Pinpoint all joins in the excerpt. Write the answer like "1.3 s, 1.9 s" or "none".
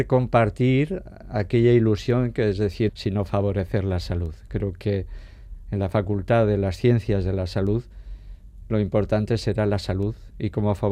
2.9 s, 8.7 s